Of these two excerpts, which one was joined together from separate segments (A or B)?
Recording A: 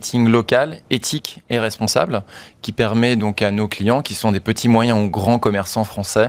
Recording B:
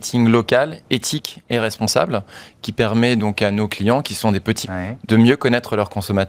B